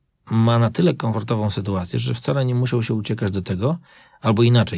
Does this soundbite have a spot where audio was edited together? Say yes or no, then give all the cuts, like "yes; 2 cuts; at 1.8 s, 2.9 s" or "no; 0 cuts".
no; 0 cuts